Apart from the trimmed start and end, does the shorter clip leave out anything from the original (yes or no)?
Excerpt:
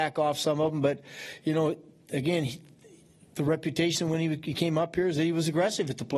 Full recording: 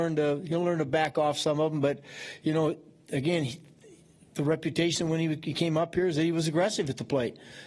no